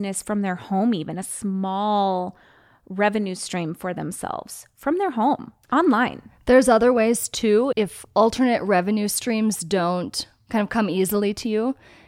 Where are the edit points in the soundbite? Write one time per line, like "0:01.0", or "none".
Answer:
0:07.7